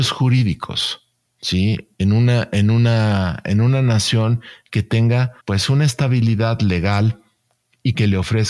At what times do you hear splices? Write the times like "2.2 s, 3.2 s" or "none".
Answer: 5.4 s